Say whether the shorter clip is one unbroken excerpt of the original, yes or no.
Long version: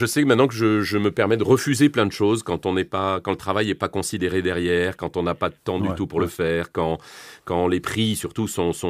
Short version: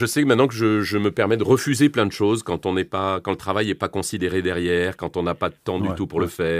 yes